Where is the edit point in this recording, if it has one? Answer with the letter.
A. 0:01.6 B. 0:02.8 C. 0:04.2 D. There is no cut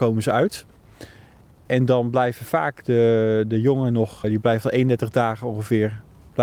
C